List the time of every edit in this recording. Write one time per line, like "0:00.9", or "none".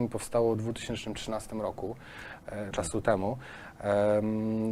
0:02.7